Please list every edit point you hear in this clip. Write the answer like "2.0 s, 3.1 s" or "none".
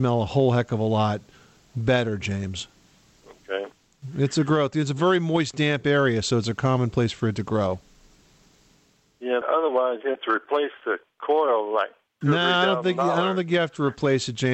9.4 s